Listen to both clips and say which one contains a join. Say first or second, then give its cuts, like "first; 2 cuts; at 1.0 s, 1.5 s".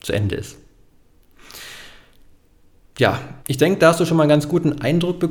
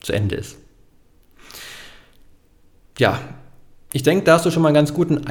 first; 1 cut; at 3.4 s